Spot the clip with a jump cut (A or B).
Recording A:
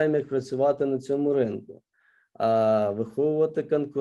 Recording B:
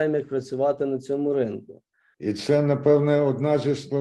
B